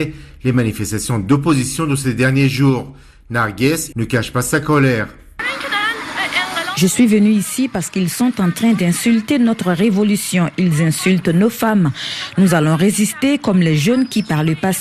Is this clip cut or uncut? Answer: cut